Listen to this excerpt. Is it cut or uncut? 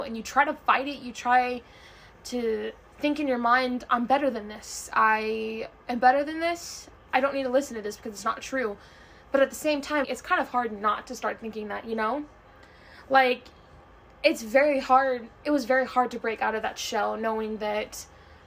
cut